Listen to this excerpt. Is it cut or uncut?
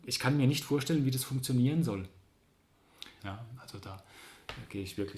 cut